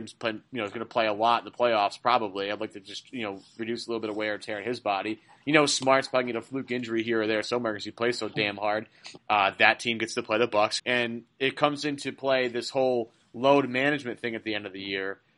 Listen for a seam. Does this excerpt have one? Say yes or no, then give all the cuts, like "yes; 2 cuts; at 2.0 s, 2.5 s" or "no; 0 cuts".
yes; 2 cuts; at 9.2 s, 10.8 s